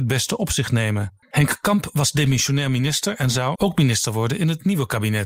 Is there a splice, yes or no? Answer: yes